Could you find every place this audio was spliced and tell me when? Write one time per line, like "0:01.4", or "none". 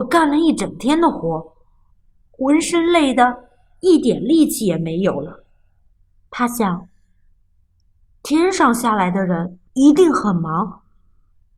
0:06.3
0:09.7